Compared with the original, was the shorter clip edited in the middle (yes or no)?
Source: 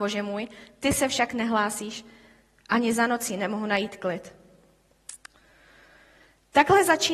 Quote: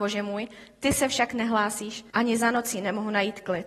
yes